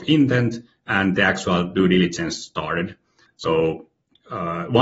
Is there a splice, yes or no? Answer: yes